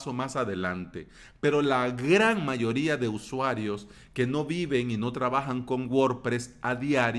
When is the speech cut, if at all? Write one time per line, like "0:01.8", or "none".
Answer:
none